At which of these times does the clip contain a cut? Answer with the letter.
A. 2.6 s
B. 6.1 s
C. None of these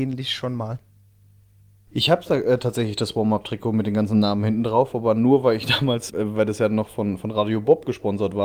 B